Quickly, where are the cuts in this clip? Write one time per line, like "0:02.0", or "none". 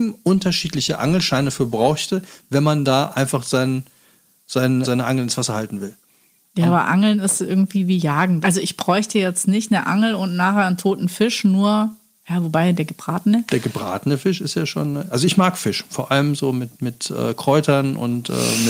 0:04.8
0:08.4